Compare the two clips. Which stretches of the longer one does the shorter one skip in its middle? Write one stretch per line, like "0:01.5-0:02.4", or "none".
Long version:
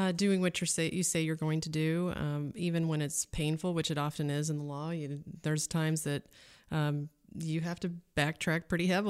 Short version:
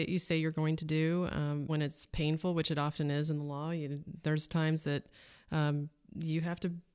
0:02.5-0:02.9